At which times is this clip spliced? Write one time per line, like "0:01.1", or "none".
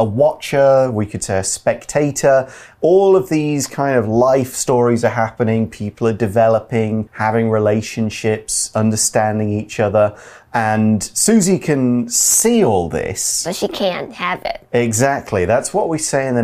0:07.1